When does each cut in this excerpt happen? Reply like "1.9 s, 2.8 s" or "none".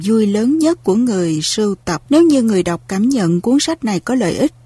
2.1 s